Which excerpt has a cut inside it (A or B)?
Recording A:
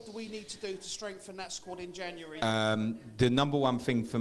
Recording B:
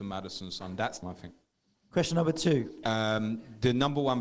B